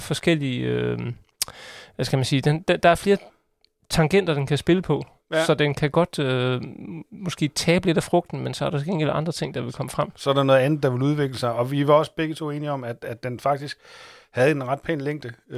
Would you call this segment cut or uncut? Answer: uncut